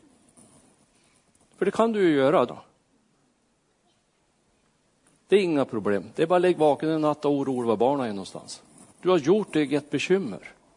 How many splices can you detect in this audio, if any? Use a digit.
2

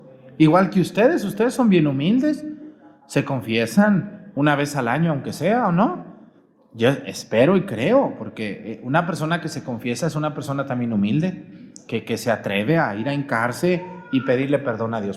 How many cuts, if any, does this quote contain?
0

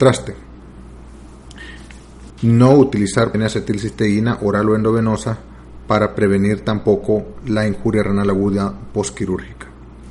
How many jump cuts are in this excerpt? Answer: 2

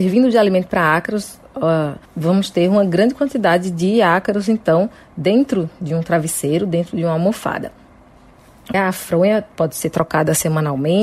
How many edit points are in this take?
2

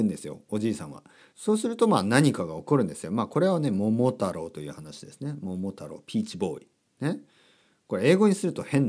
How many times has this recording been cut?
1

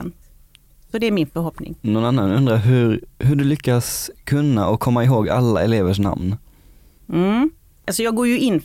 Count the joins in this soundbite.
1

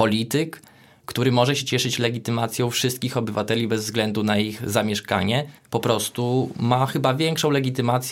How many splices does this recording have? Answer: 1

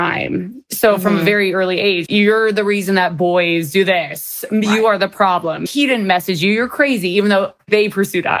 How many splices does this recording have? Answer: 1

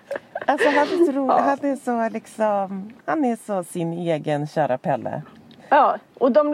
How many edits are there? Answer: 1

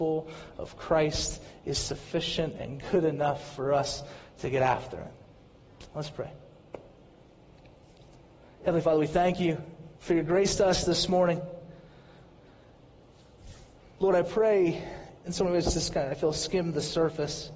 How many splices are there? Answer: 2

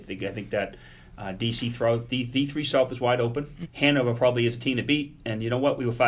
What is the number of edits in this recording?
1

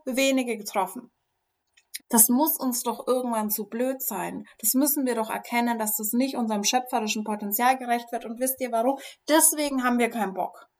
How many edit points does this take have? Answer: 1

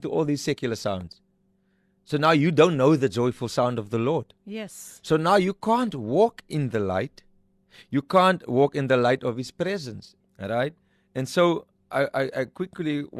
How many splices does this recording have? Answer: 1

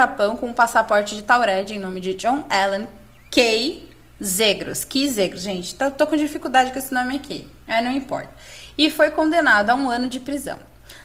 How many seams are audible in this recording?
0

